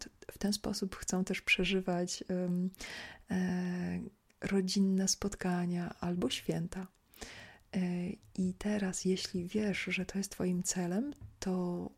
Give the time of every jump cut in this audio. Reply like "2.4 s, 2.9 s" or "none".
none